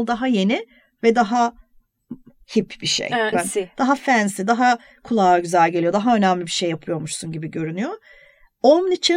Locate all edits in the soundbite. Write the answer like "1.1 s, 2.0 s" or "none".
3.3 s